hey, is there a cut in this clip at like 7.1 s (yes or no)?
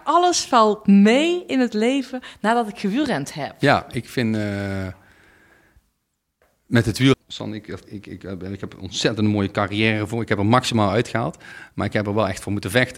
yes